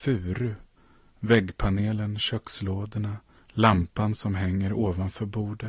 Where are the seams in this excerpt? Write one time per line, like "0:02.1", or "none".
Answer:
0:02.2
0:03.3